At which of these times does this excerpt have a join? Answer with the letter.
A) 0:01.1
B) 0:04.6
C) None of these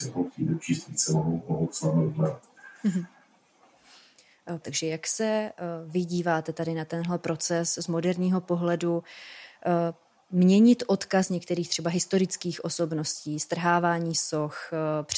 B